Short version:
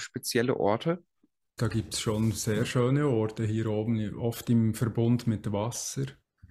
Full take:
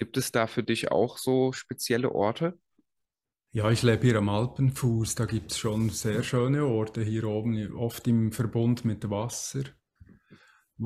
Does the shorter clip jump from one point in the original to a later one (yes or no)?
yes